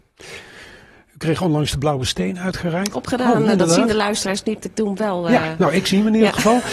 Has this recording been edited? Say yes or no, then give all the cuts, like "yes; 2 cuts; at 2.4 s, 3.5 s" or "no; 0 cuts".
yes; 2 cuts; at 2.9 s, 4.6 s